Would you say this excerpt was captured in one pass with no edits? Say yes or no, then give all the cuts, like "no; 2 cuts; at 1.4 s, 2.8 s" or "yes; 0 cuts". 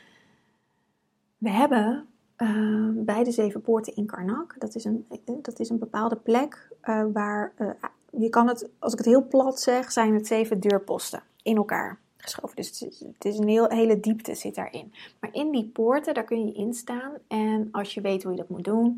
yes; 0 cuts